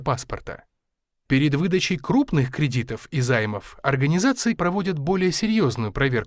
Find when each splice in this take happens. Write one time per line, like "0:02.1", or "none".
0:04.6